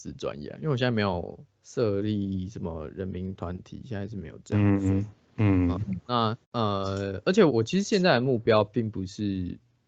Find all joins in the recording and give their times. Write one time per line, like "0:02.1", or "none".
0:06.4
0:07.5

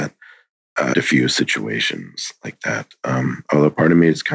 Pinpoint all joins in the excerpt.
0:00.9

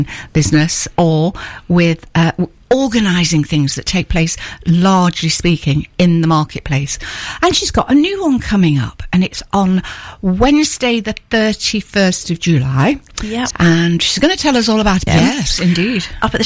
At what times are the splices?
0:13.5
0:15.1

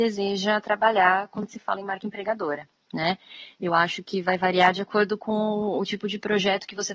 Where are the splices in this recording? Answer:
none

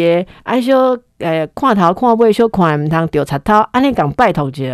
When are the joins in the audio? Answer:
none

